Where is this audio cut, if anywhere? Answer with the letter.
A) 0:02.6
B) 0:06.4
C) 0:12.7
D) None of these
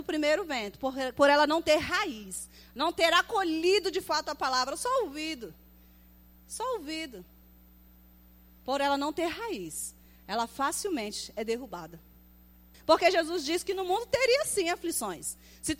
C